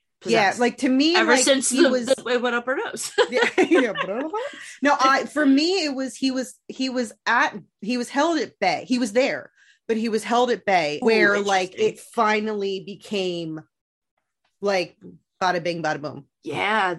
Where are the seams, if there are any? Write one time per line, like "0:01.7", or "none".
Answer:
0:11.0